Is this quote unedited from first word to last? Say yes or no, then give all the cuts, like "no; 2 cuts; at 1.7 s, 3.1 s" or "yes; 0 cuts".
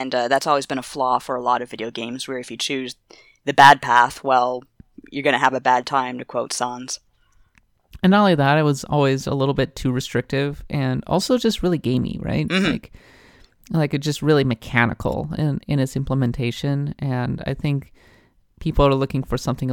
yes; 0 cuts